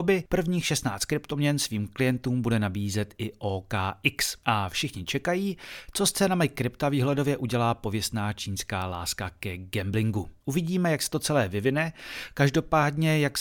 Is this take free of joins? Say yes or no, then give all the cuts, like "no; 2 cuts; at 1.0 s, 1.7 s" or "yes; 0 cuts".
yes; 0 cuts